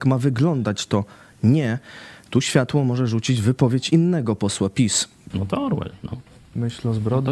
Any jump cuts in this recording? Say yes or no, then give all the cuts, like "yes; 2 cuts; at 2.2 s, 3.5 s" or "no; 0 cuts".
yes; 1 cut; at 5.3 s